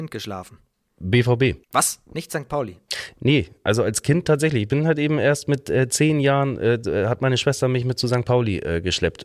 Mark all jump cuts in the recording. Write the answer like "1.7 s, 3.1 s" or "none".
none